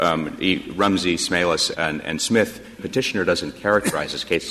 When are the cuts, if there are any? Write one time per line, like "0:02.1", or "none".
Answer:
0:01.7
0:02.8